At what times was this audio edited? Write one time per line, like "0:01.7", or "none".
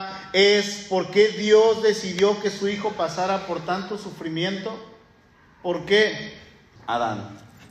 0:06.8